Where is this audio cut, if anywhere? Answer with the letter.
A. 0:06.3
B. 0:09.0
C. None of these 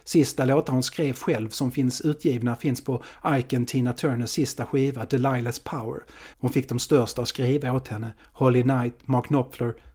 A